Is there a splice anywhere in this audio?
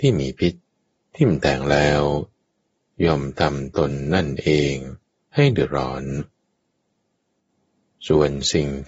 no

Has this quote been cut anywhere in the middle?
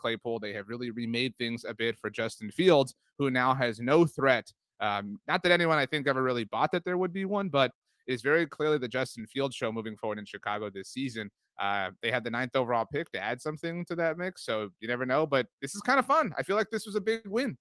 no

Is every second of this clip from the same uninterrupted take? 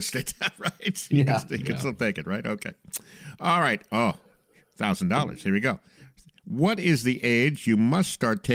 yes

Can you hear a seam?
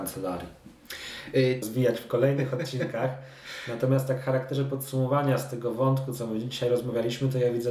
yes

